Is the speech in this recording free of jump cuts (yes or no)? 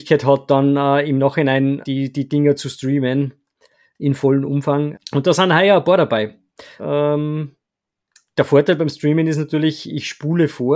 no